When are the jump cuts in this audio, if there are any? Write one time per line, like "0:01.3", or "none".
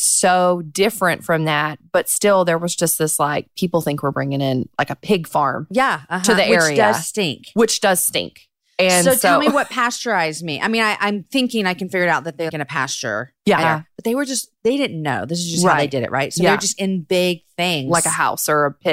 0:12.5
0:13.6